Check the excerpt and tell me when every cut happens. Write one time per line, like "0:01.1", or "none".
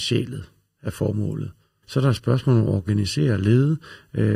0:01.8